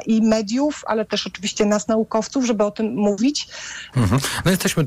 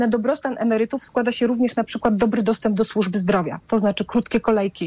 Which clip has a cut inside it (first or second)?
first